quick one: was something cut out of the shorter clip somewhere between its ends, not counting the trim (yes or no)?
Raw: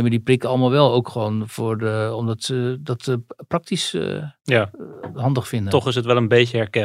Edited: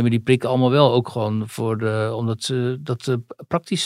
no